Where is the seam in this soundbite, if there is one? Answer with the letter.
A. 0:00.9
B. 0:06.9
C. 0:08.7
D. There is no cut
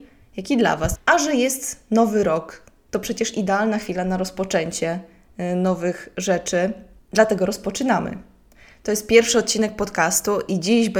A